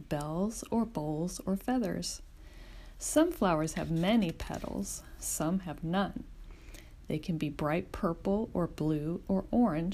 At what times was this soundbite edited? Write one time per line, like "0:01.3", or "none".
none